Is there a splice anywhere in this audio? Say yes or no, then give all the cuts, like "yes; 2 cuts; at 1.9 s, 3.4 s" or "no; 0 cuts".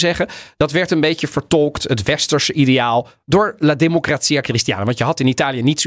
no; 0 cuts